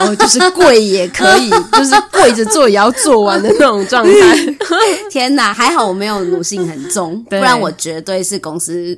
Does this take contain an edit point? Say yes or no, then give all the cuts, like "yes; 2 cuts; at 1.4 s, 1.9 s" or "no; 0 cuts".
no; 0 cuts